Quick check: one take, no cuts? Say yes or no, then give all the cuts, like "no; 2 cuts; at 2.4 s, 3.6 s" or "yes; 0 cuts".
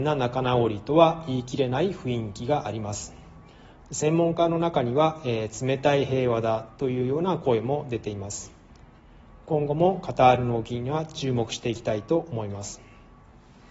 yes; 0 cuts